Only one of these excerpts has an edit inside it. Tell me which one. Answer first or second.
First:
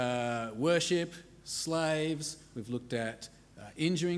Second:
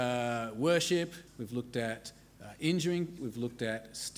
second